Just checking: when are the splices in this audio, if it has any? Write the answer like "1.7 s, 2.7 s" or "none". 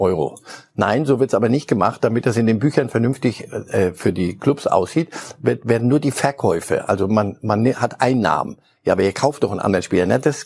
none